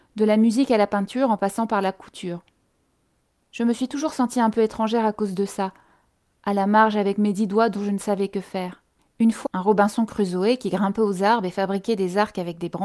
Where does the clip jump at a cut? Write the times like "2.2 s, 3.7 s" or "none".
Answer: 9.5 s